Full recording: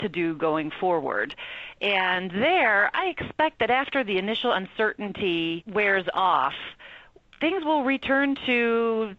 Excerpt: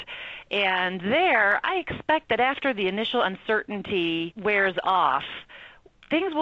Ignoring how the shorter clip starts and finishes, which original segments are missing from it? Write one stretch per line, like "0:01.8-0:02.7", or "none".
none